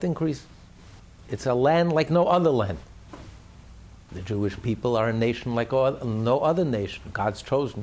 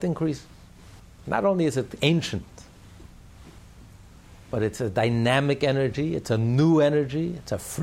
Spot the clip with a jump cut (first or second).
first